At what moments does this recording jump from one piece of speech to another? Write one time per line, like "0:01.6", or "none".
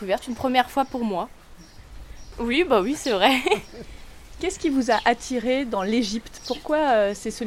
0:02.3